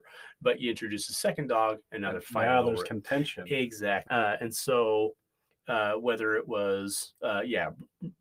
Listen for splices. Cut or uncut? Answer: cut